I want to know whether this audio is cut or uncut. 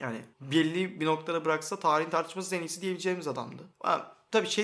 uncut